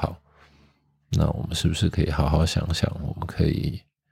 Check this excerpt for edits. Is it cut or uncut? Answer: uncut